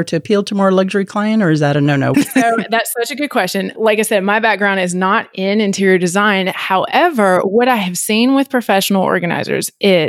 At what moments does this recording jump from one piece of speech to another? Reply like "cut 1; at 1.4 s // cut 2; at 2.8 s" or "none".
cut 1; at 2.1 s